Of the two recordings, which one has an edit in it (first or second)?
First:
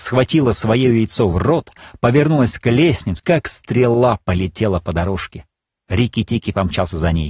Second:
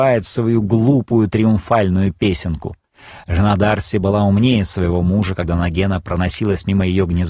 first